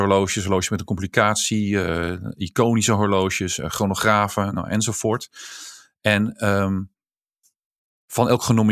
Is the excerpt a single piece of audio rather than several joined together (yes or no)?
yes